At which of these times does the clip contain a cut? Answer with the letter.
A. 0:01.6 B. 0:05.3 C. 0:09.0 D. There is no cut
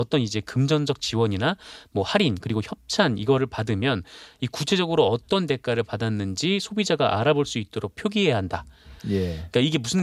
C